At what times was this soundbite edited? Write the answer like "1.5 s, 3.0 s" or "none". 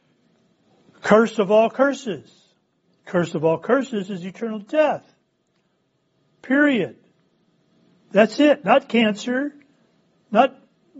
none